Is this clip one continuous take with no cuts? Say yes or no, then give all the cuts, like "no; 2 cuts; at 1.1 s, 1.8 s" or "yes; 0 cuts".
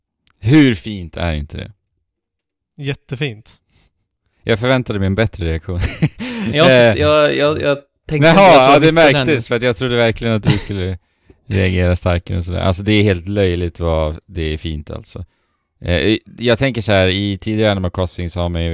yes; 0 cuts